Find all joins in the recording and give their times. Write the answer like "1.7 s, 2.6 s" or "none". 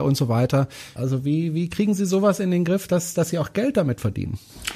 1.0 s